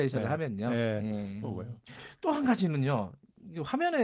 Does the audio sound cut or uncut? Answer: cut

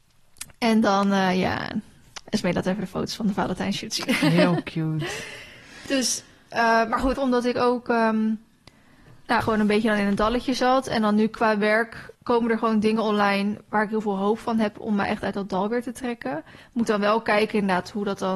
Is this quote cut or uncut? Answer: cut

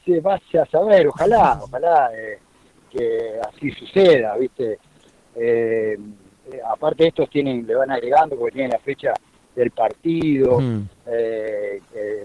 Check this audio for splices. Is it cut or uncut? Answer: uncut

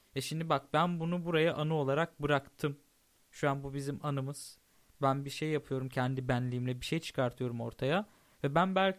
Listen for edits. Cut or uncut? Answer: uncut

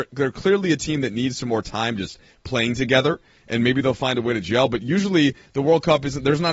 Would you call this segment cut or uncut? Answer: uncut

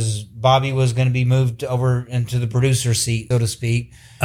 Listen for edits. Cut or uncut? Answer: cut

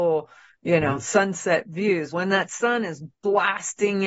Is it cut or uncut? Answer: cut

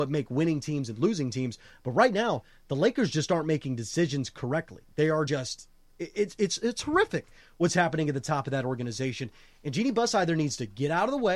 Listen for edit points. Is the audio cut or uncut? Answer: uncut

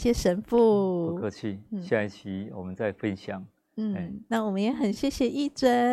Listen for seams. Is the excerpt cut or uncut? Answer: uncut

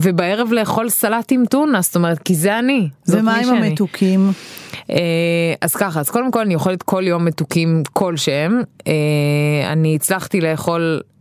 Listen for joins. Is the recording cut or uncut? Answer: uncut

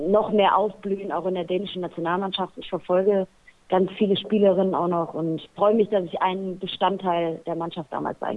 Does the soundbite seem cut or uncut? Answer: uncut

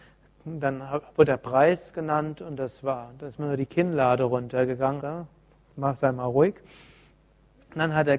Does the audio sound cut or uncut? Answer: cut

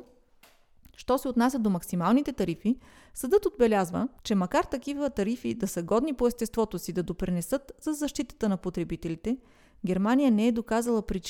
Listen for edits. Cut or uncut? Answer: cut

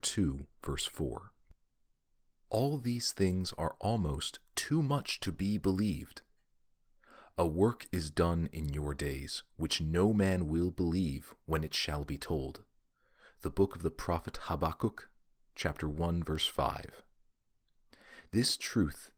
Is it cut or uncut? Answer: uncut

